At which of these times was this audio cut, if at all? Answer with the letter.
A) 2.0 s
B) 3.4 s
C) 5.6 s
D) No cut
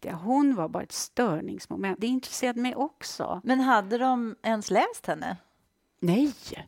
A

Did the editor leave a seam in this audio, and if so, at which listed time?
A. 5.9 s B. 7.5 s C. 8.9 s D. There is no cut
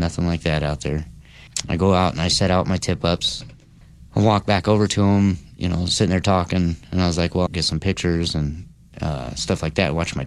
B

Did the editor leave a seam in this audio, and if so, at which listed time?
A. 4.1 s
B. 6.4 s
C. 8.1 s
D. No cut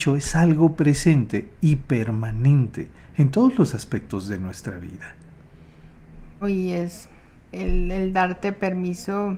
B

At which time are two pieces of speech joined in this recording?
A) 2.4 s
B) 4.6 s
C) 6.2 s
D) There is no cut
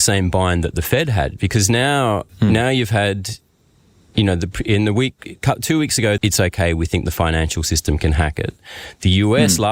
C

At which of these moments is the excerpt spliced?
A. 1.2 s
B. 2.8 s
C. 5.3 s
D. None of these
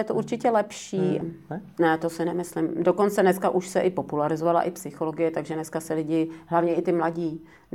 A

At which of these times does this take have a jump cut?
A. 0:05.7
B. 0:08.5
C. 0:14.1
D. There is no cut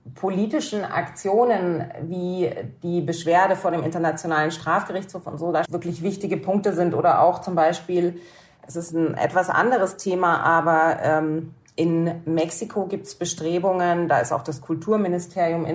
A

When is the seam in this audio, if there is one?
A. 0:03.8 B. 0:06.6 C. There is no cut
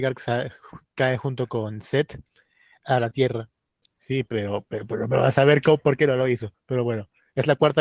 A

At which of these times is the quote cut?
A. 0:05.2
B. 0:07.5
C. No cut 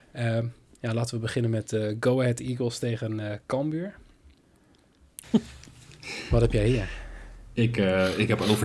A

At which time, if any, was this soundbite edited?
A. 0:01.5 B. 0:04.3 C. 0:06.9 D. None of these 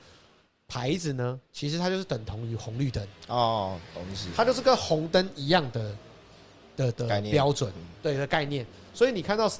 C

